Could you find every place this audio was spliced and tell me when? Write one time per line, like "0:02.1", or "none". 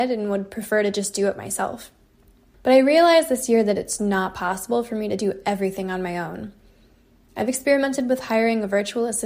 0:04.0